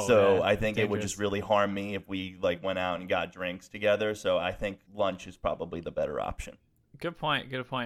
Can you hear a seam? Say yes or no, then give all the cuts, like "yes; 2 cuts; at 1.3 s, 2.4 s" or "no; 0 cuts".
yes; 1 cut; at 4.9 s